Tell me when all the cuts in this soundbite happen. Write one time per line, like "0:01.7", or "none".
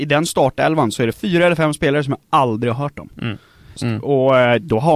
0:01.1
0:03.8